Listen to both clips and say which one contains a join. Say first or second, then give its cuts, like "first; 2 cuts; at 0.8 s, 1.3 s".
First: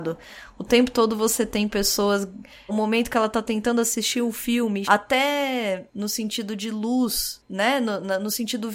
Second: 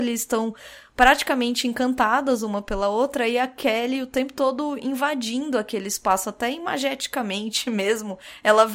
first; 2 cuts; at 2.7 s, 4.8 s